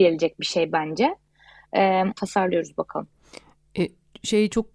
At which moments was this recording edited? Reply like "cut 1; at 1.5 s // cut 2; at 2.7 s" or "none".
cut 1; at 2.1 s

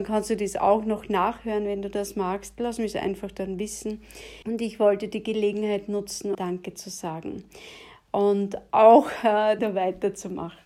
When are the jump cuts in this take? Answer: cut 1; at 4.4 s // cut 2; at 6.3 s // cut 3; at 9.6 s

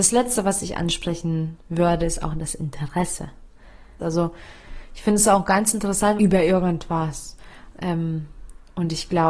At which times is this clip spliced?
cut 1; at 4.0 s // cut 2; at 6.2 s // cut 3; at 7.7 s

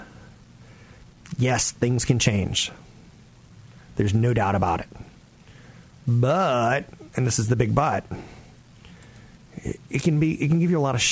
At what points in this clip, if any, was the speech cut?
none

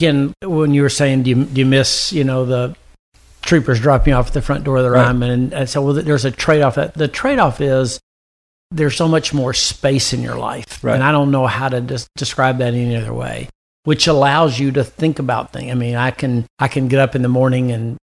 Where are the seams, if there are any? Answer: cut 1; at 9.0 s // cut 2; at 16.5 s

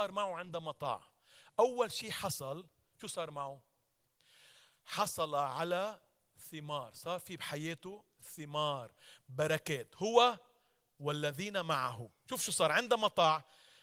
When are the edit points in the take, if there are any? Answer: none

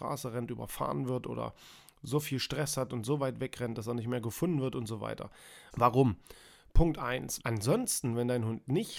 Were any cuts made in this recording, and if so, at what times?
cut 1; at 5.7 s // cut 2; at 7.4 s

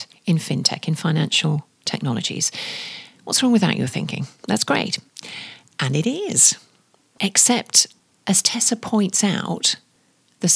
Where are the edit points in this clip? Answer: none

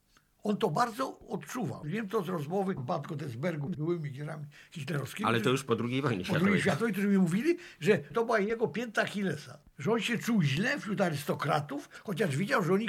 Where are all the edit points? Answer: none

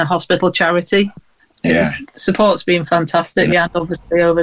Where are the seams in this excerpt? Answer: cut 1; at 3.5 s

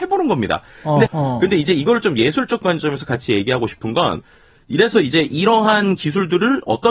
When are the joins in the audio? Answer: cut 1; at 1.1 s

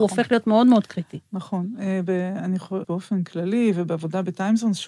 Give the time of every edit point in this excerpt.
cut 1; at 2.8 s

